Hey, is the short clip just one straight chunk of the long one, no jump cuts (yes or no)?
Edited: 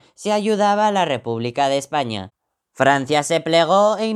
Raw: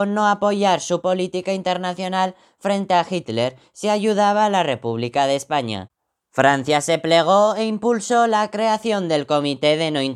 yes